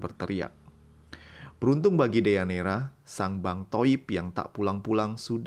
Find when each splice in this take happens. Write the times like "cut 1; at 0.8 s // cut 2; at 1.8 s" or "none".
none